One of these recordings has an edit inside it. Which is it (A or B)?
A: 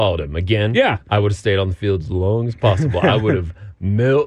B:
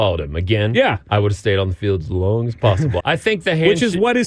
B